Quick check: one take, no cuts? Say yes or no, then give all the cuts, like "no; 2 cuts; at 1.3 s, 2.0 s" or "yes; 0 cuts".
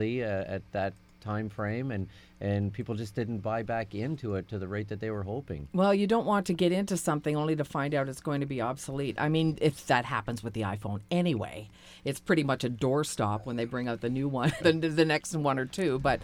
no; 1 cut; at 14.6 s